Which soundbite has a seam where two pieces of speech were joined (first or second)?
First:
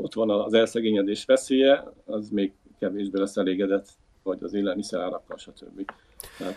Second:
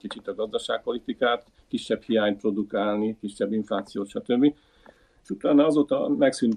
first